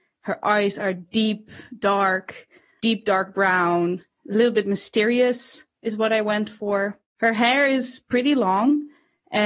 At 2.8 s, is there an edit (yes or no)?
yes